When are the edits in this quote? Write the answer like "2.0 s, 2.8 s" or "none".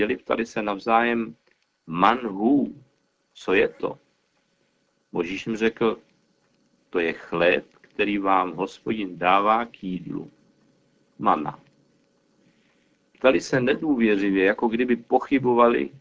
none